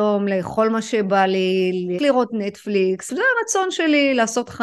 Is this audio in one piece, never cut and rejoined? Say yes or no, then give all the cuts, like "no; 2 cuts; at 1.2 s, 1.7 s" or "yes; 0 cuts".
no; 2 cuts; at 2.0 s, 3.1 s